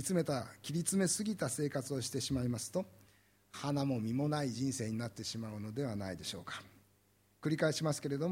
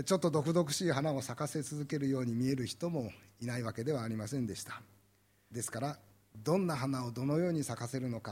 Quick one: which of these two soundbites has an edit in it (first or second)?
second